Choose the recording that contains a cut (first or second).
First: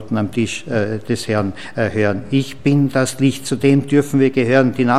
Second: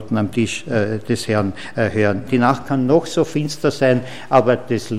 second